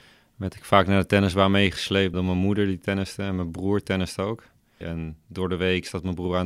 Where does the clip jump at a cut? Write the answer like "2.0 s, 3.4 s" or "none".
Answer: 2.1 s, 4.8 s